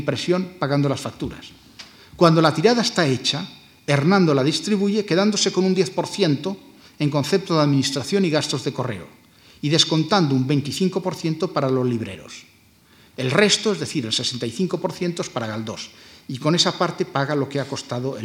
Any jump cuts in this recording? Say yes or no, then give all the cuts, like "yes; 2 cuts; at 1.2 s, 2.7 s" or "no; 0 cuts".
no; 0 cuts